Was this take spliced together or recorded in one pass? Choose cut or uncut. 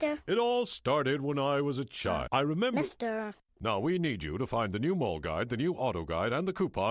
cut